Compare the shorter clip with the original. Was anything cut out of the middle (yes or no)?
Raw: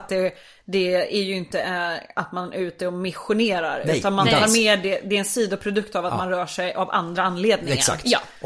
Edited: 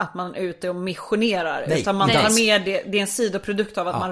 no